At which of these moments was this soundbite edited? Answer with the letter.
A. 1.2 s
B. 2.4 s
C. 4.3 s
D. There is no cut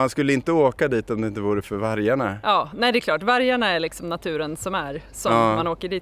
D